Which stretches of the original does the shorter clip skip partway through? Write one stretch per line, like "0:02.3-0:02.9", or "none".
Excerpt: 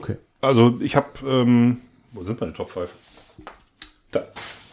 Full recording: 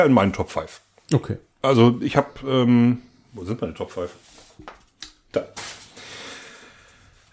none